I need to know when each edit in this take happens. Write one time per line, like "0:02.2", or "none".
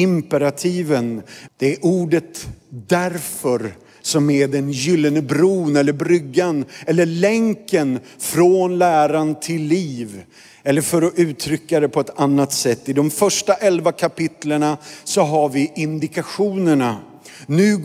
0:01.5